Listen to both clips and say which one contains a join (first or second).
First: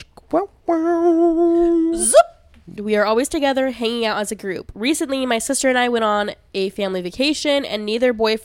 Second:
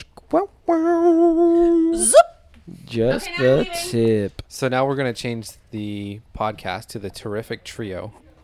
first